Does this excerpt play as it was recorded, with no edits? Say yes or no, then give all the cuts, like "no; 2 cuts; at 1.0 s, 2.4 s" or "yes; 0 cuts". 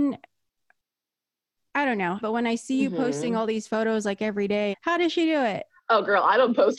no; 2 cuts; at 2.2 s, 4.7 s